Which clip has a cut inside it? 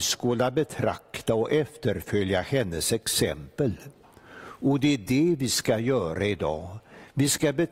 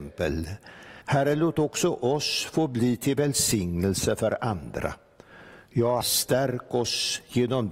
second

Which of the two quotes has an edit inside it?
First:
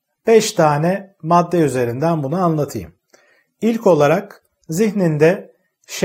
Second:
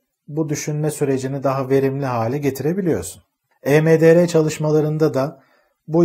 second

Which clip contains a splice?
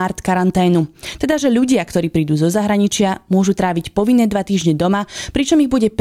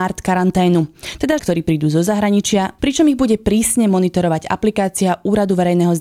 second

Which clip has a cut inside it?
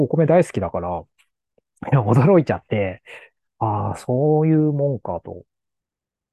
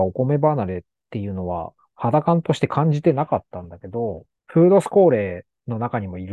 second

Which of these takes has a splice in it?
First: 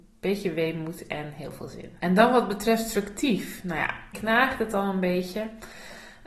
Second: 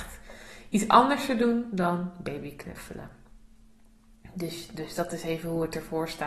first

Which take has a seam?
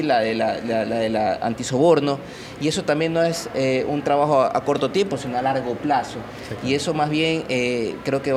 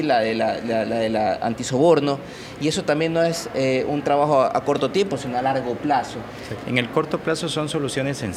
second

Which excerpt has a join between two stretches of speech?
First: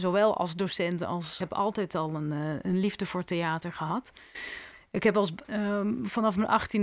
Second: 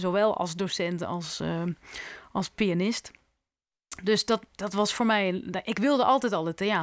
first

